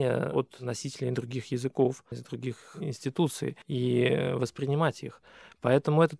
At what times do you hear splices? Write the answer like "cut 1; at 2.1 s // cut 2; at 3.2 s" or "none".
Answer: cut 1; at 2.1 s // cut 2; at 3.6 s